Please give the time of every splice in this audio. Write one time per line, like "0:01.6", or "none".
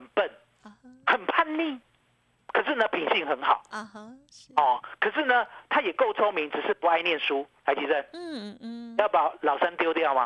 none